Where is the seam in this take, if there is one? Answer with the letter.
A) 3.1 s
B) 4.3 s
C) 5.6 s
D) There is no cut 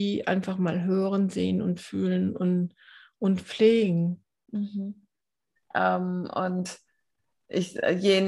C